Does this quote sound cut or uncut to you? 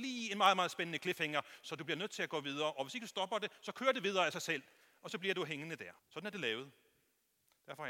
cut